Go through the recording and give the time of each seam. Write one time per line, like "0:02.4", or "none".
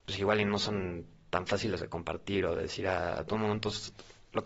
none